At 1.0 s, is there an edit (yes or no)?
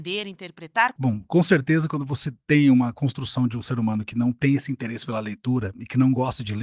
yes